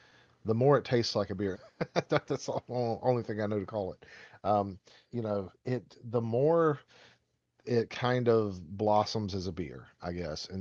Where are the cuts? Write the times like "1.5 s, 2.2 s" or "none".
1.5 s, 5.0 s